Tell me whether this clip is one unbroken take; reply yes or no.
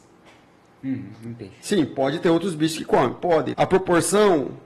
no